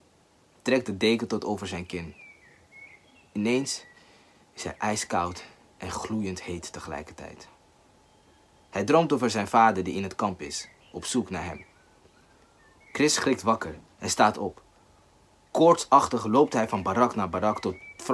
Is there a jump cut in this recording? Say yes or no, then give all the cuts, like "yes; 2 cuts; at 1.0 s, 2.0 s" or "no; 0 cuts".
no; 0 cuts